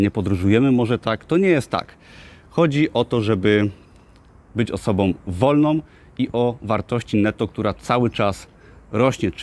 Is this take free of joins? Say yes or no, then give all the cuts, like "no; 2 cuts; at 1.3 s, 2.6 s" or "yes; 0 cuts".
yes; 0 cuts